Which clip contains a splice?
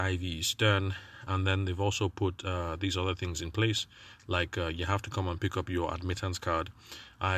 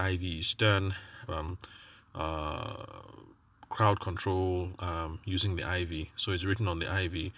second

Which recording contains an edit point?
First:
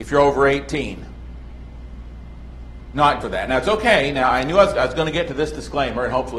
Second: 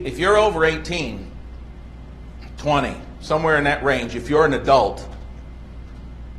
first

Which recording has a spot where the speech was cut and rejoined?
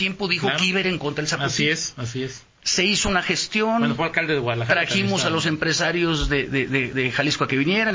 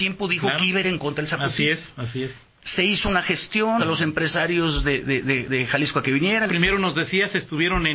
second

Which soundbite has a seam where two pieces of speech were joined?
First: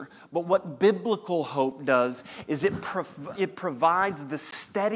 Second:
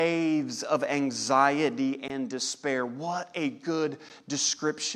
first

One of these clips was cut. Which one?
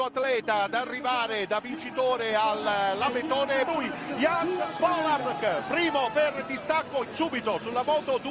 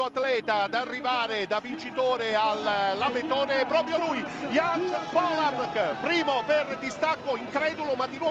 first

